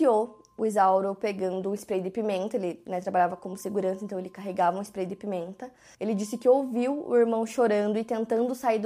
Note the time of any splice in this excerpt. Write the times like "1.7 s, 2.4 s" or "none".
5.9 s